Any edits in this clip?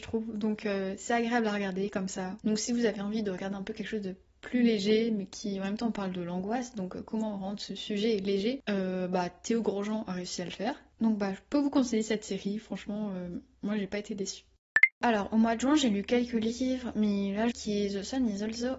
yes; 2 cuts; at 14.9 s, 17.5 s

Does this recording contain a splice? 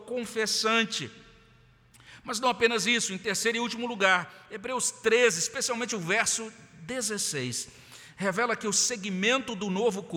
no; 0 cuts

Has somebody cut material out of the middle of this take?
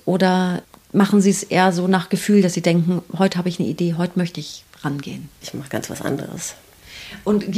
yes; 1 cut; at 5.4 s

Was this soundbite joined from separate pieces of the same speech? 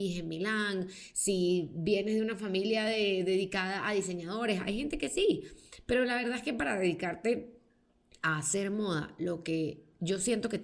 no; 0 cuts

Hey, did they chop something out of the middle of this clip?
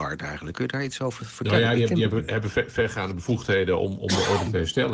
no; 0 cuts

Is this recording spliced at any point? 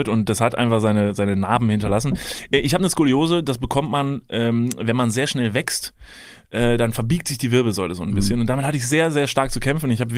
no; 0 cuts

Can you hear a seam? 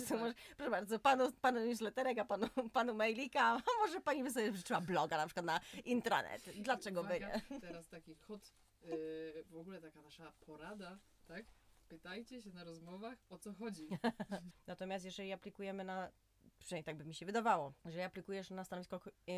yes; 2 cuts; at 14.5 s, 17.8 s

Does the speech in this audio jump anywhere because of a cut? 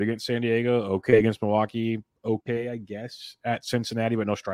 no; 0 cuts

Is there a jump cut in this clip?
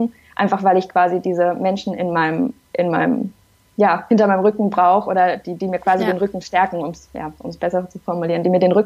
no; 0 cuts

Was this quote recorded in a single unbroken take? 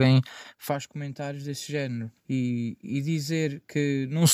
no; 1 cut; at 2.2 s

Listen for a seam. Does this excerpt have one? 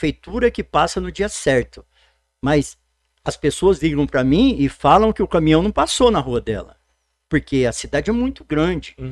no; 0 cuts

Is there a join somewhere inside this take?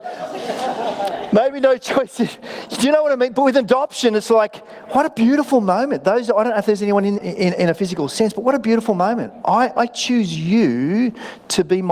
yes; 1 cut; at 7.2 s

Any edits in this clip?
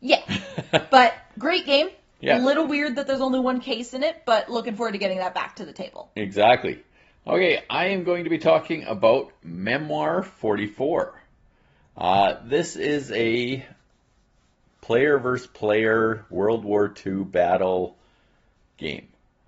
no; 0 cuts

